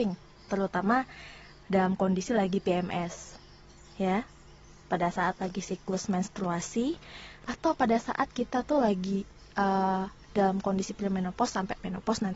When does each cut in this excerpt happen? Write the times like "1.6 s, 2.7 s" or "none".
10.2 s